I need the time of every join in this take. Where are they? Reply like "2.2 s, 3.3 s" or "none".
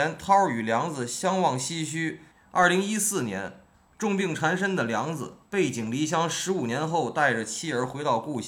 2.3 s, 5.5 s

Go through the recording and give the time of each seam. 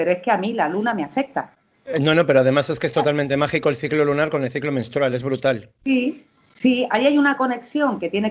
none

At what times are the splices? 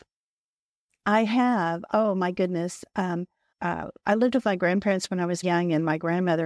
3.5 s, 5.4 s

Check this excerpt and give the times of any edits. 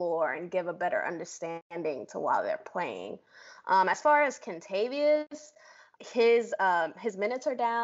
6.0 s

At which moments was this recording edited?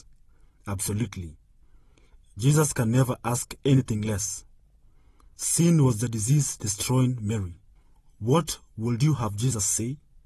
none

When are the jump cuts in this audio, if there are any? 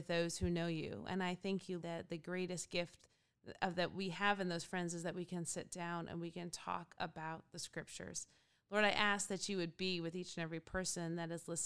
1.8 s

